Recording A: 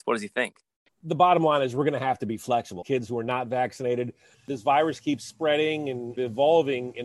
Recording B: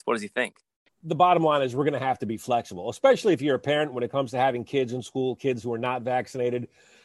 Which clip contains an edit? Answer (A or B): A